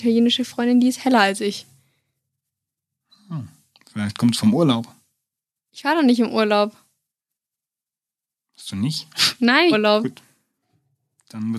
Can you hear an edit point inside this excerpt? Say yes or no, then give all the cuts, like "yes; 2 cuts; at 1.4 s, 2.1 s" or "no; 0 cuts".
yes; 1 cut; at 9.7 s